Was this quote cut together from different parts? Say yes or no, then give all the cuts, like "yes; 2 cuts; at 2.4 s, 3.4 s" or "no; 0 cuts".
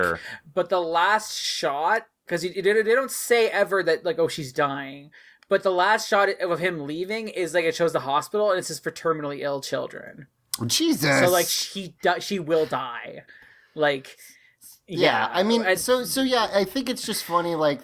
no; 0 cuts